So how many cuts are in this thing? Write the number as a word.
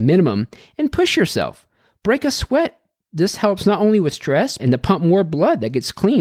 one